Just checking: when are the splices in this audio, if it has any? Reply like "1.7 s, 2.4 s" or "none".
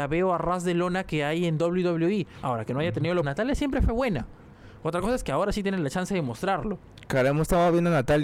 3.2 s